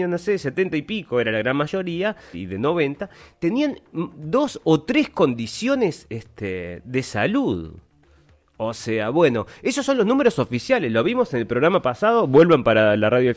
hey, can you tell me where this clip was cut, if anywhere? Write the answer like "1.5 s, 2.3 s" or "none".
2.3 s